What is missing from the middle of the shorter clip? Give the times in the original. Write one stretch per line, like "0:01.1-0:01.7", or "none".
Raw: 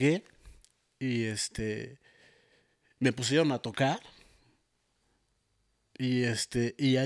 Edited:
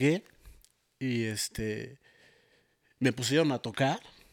none